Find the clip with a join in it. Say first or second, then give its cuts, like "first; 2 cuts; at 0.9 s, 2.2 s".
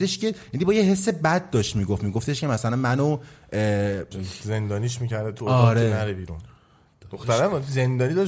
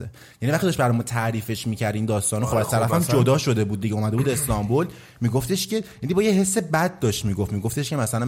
first; 1 cut; at 4.1 s